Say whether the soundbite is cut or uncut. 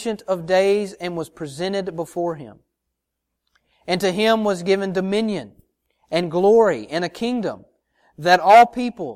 uncut